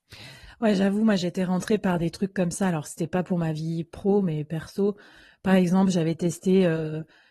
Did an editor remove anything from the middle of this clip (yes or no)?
no